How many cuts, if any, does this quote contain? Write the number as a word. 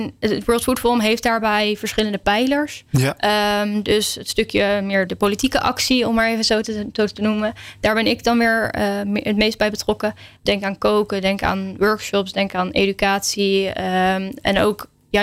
two